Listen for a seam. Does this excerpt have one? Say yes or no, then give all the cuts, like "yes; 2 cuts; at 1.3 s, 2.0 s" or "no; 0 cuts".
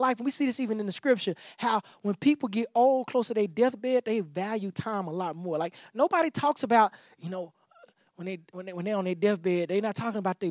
no; 0 cuts